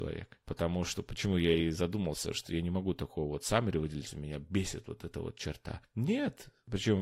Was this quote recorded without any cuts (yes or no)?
no